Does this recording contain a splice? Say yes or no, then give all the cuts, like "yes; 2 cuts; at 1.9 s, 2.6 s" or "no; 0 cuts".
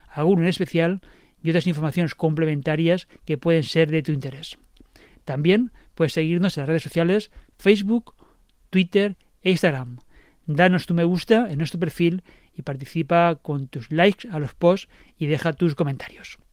no; 0 cuts